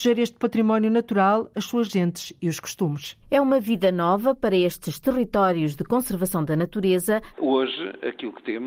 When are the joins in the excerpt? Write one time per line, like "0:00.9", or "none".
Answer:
0:03.2
0:07.3